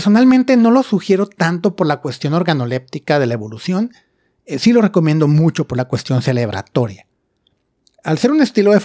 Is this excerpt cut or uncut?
uncut